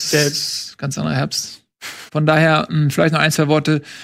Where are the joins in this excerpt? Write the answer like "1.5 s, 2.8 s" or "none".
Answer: 2.1 s